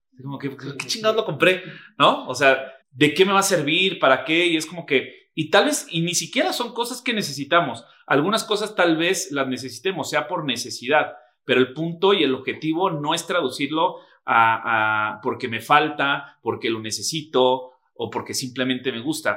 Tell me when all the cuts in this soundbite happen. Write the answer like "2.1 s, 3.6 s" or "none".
2.8 s